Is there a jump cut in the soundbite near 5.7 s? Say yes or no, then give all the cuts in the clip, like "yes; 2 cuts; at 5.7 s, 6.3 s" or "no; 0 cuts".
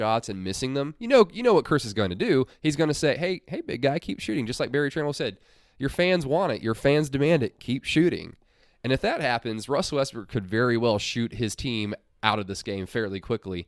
no; 0 cuts